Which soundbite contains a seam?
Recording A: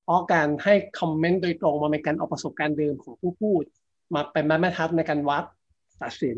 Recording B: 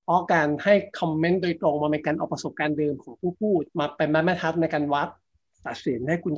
B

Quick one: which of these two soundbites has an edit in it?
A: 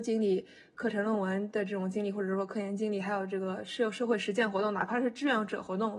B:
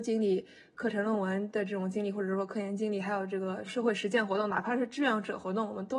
B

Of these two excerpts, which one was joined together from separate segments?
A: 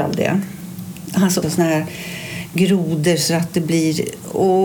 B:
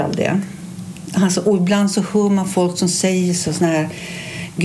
A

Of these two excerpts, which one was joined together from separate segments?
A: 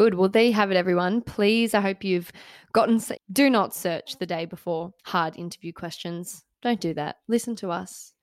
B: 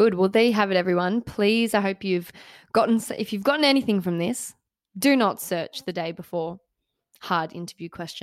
A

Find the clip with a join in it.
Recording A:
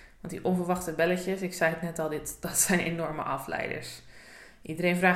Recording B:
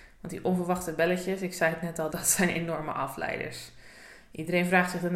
B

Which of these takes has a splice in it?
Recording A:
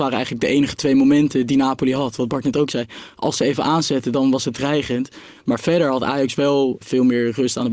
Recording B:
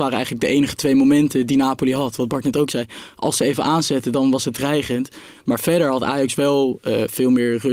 A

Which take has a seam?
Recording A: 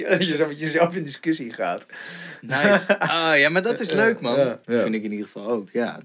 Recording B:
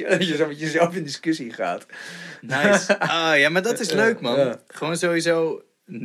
A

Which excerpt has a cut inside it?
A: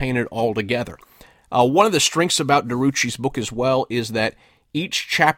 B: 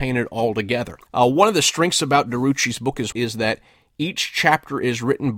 B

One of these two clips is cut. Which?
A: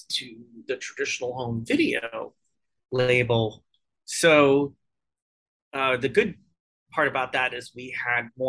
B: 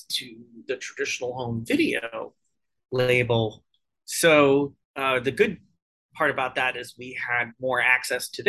B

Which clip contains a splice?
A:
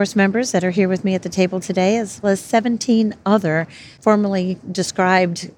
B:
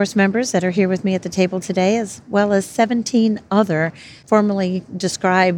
A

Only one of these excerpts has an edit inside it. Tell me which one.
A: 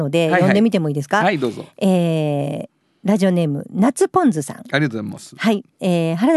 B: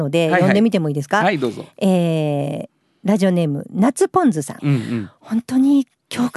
B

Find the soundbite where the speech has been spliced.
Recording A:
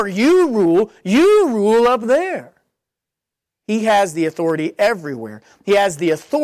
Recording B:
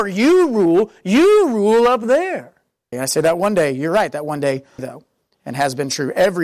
B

